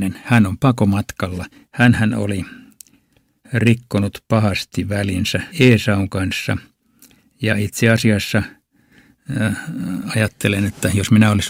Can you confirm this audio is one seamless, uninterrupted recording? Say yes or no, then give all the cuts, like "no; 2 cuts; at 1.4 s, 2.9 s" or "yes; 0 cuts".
no; 2 cuts; at 1.6 s, 5.5 s